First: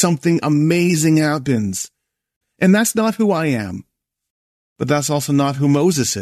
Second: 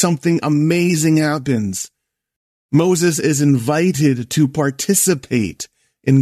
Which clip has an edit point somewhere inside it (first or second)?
first